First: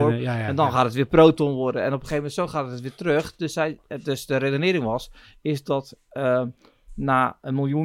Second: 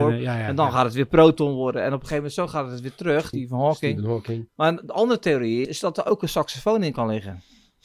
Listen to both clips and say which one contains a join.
second; 3 cuts; at 3.3 s, 4.5 s, 5.6 s

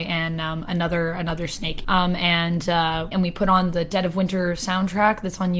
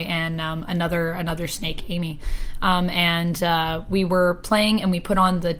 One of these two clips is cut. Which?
first; 2 cuts; at 1.8 s, 3.1 s

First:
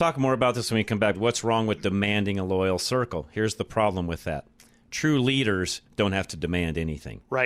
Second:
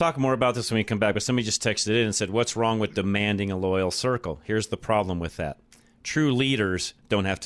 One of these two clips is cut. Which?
first; 1 cut; at 1.1 s

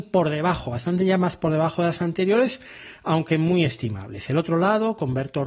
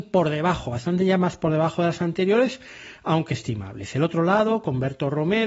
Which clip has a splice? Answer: second; 1 cut; at 3.3 s

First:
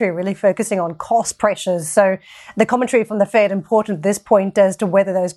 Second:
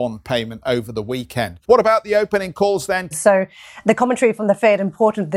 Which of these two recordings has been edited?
second; 2 cuts; at 1.6 s, 3.1 s

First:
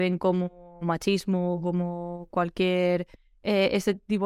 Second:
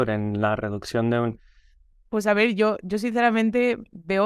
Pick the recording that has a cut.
second; 1 cut; at 1.9 s

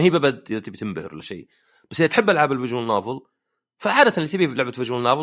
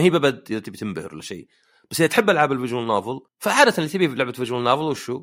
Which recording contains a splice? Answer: second; 1 cut; at 3.3 s

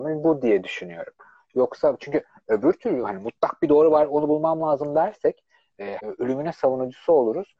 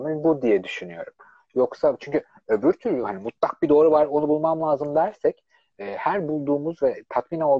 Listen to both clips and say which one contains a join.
first; 1 cut; at 6.0 s

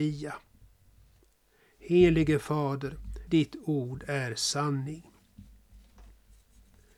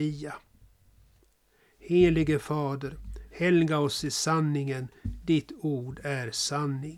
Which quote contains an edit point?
first; 1 cut; at 3.3 s

